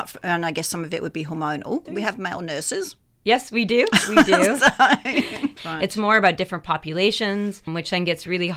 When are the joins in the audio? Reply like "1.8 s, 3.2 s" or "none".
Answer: 1.9 s, 5.6 s